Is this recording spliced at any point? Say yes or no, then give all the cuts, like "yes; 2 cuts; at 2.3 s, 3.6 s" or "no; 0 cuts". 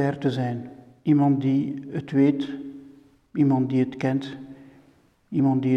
no; 0 cuts